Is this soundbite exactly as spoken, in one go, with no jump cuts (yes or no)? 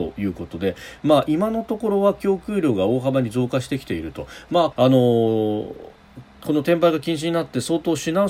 no